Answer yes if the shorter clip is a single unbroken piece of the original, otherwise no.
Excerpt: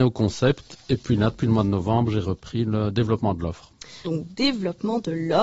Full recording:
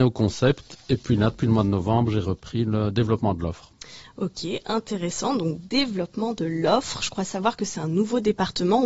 no